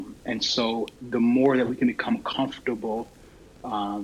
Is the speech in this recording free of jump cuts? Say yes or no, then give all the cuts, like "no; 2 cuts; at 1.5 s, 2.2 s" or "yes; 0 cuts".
no; 1 cut; at 1.0 s